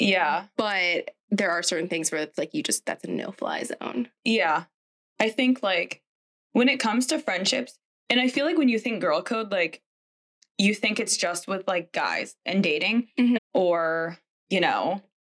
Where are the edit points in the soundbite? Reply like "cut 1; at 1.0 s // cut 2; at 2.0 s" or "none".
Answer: cut 1; at 5.0 s // cut 2; at 13.4 s